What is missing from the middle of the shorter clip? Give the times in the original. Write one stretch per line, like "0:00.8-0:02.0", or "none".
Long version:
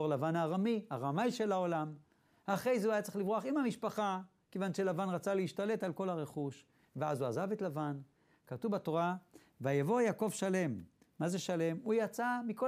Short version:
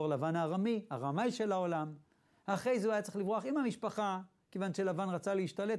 none